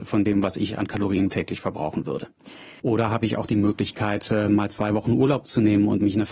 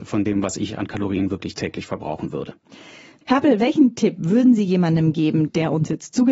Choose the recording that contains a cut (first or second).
first